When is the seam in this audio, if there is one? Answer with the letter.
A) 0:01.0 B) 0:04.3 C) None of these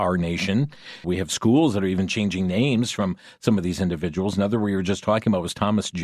A